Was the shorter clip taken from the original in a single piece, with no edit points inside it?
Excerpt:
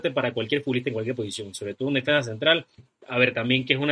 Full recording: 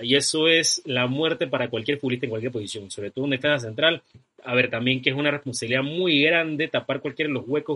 yes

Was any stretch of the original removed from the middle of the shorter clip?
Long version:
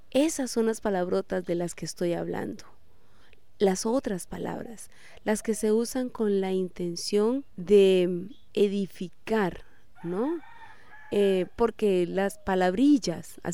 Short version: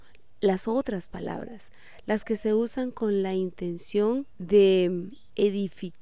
no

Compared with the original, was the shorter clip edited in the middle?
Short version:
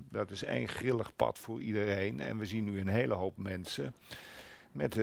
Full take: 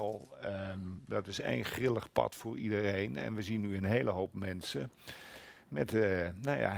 no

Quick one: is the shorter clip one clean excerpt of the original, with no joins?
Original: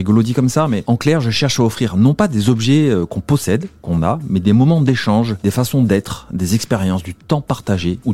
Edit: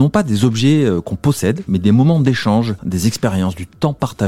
no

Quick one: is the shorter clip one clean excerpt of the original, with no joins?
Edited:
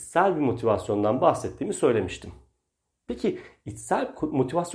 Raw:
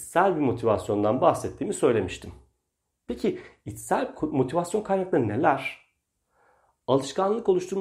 yes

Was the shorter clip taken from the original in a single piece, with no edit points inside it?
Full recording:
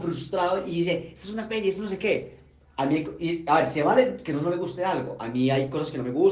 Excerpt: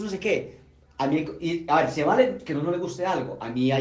yes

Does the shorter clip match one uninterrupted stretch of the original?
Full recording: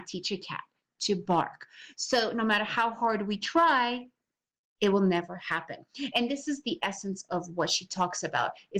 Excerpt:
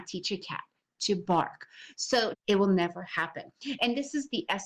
no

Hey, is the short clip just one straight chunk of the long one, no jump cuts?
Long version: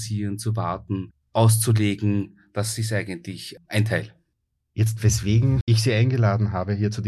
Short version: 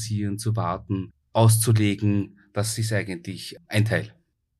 yes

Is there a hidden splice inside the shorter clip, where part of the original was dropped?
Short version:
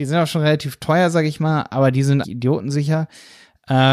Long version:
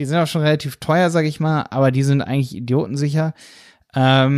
yes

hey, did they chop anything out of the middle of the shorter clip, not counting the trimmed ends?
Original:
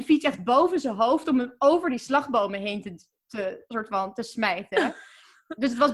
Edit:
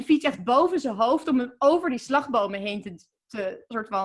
no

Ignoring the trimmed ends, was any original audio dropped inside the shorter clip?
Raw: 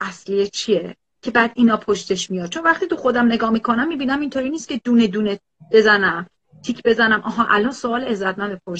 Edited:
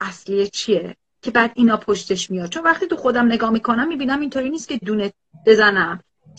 yes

